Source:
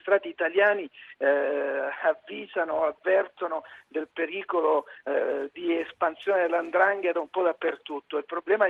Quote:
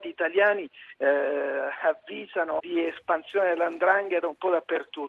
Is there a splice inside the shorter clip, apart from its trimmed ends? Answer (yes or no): yes